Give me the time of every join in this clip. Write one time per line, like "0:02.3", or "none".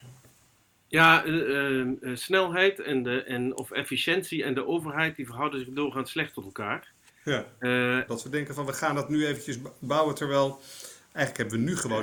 0:08.1